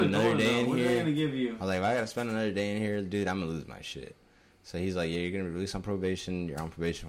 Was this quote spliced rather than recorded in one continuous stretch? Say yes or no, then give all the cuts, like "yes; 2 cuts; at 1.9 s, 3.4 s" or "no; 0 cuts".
no; 0 cuts